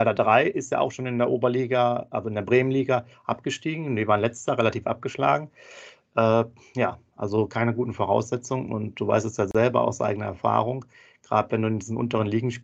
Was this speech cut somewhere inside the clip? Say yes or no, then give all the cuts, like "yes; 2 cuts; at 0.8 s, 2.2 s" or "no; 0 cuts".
no; 0 cuts